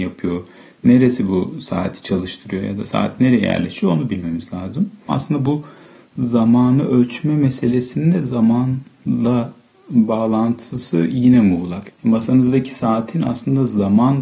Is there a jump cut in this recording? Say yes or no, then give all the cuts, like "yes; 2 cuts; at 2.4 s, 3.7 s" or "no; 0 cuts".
yes; 2 cuts; at 5.1 s, 11.9 s